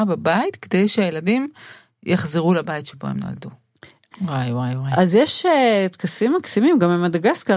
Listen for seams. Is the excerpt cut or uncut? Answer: cut